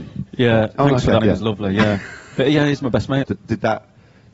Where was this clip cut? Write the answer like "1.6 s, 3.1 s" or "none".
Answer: 1.2 s, 3.2 s